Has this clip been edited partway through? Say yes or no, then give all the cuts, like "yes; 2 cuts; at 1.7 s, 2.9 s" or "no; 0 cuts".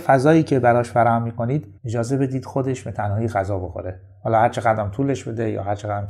yes; 1 cut; at 1.8 s